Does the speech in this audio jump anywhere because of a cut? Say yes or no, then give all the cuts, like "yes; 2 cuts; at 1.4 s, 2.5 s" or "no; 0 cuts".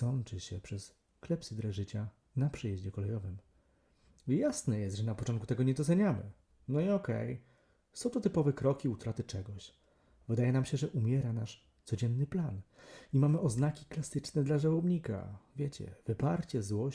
no; 0 cuts